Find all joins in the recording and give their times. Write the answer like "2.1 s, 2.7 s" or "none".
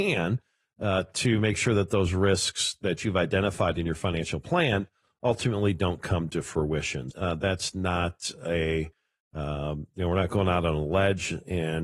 7.1 s